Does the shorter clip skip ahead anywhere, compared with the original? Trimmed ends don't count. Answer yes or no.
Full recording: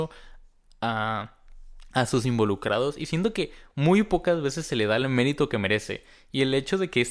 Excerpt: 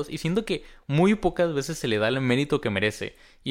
no